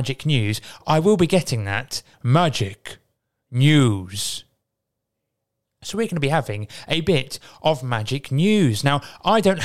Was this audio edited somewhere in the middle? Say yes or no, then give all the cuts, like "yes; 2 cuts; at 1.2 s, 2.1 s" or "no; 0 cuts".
yes; 2 cuts; at 2.1 s, 5.6 s